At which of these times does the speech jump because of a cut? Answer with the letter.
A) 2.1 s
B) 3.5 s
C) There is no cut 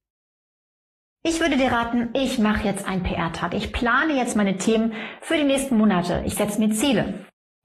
A